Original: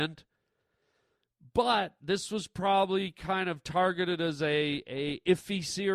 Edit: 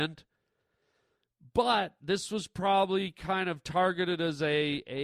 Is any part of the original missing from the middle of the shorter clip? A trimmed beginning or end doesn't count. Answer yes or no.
no